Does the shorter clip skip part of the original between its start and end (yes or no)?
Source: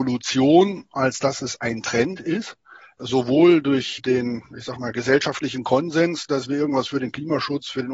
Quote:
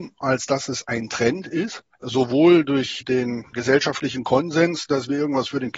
yes